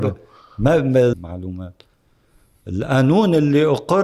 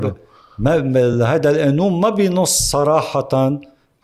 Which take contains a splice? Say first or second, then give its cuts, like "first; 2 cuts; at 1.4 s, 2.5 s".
first; 1 cut; at 1.1 s